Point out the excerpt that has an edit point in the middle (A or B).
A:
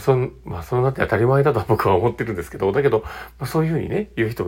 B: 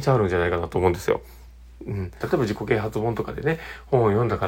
B